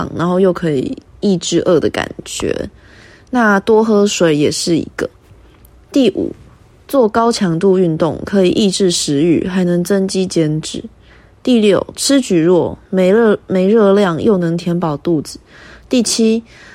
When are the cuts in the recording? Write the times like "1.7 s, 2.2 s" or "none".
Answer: none